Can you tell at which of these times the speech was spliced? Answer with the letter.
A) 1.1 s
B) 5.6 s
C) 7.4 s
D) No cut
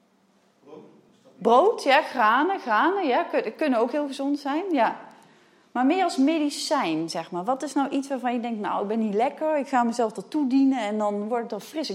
D